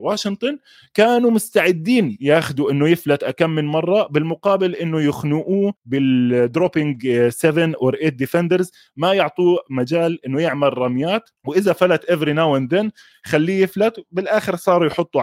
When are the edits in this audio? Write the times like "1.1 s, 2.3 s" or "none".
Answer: 5.8 s, 11.4 s